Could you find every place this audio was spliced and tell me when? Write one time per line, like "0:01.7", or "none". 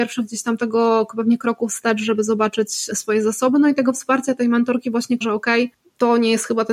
0:02.9
0:05.2